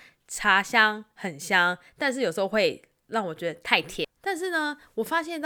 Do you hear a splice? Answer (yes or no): yes